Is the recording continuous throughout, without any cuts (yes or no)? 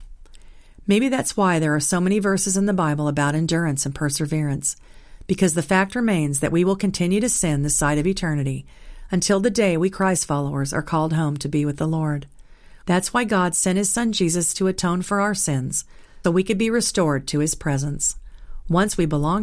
no